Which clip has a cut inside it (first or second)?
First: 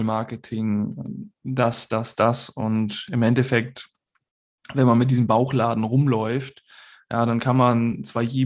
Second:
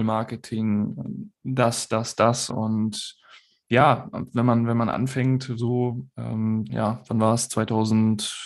second